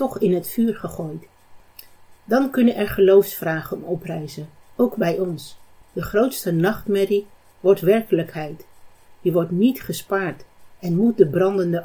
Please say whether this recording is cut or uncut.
cut